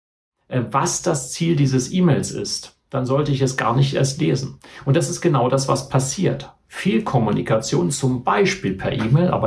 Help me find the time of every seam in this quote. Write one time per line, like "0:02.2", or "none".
none